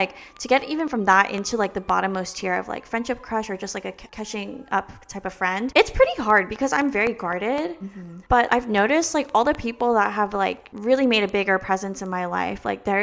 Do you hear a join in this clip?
no; 0 cuts

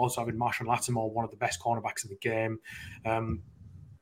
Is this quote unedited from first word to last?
yes; 0 cuts

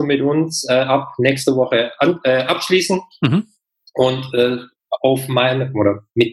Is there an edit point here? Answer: no; 0 cuts

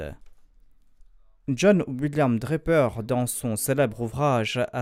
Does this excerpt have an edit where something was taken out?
no; 0 cuts

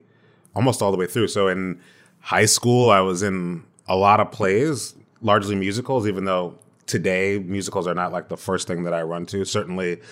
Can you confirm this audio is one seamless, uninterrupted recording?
yes; 0 cuts

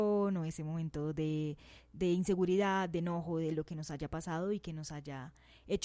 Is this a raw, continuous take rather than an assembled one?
yes; 0 cuts

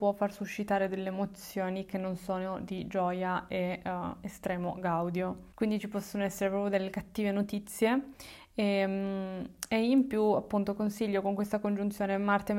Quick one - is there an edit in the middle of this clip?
no; 0 cuts

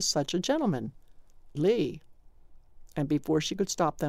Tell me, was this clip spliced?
yes; 1 cut; at 1.6 s

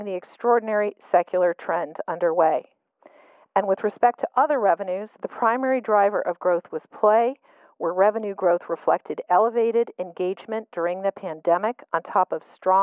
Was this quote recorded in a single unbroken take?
yes; 0 cuts

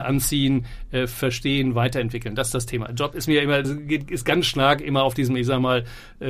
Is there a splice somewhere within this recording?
yes; 1 cut; at 3.6 s

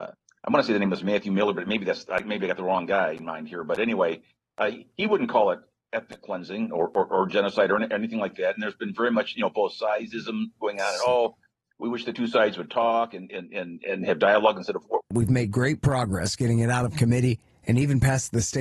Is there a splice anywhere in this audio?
yes; 1 cut; at 15.0 s

